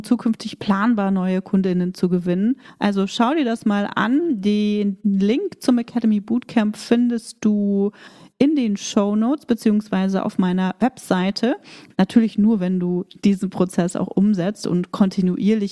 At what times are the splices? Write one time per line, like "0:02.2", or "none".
0:02.7
0:11.9